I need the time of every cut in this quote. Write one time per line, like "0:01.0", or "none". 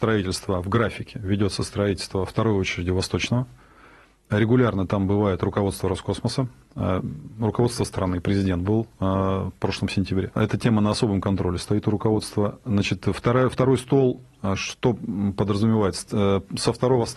none